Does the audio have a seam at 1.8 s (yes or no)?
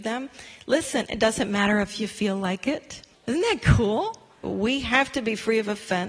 no